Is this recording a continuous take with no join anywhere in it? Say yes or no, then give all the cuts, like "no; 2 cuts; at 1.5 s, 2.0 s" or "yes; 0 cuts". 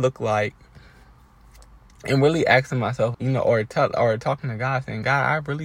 no; 1 cut; at 3.1 s